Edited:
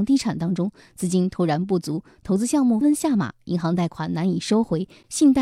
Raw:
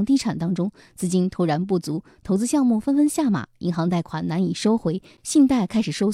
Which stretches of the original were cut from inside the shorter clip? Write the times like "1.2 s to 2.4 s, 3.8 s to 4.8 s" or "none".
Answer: 2.8 s to 3.0 s